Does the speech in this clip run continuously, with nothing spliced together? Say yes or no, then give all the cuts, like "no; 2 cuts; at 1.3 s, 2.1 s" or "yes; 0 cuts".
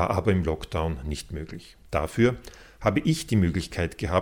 no; 1 cut; at 1.9 s